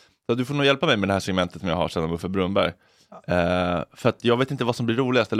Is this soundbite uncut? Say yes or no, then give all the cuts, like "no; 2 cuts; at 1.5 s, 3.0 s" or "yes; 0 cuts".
yes; 0 cuts